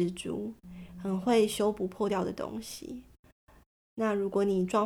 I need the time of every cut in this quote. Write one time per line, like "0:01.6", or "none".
none